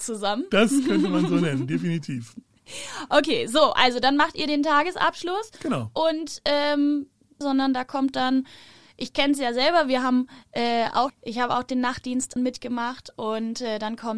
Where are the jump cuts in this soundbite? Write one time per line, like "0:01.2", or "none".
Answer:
0:07.4
0:11.1
0:12.4

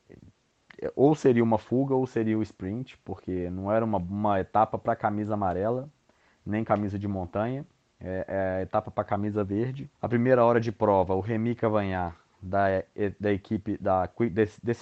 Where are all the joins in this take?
0:09.9

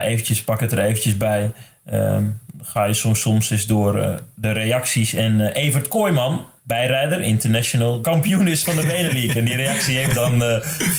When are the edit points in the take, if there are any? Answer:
0:06.6
0:08.0

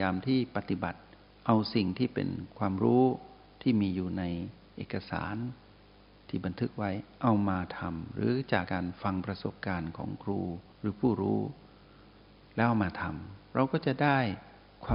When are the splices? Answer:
0:08.7
0:10.7

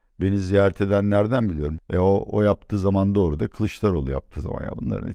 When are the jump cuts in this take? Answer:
0:01.8

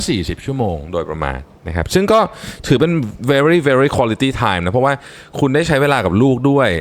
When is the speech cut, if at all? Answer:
none

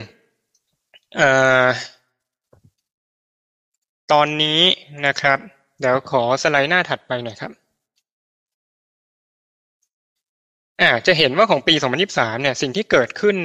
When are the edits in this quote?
none

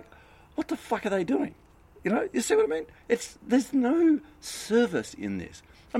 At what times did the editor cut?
none

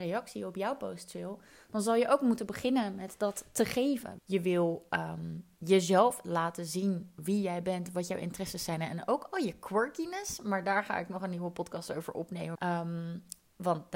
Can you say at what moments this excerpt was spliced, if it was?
0:04.2
0:12.6

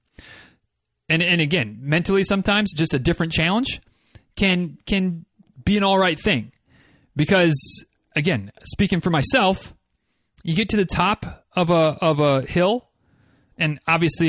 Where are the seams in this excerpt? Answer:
0:02.7

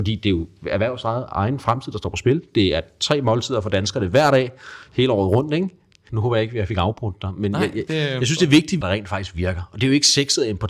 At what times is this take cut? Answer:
0:06.1
0:08.8

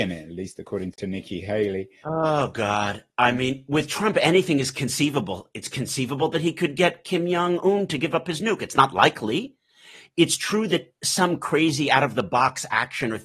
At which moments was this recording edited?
0:02.0

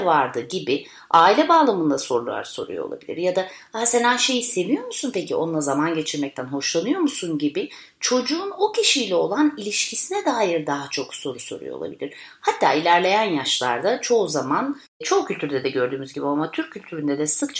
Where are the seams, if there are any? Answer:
none

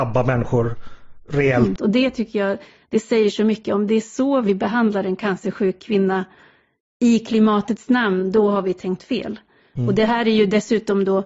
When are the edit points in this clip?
0:01.8

